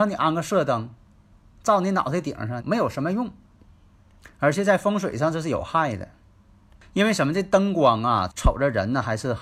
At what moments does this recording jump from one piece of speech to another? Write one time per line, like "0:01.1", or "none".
0:02.6
0:08.3